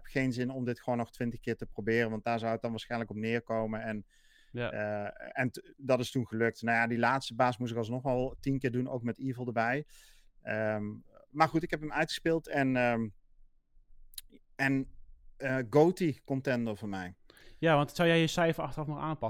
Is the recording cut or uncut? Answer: uncut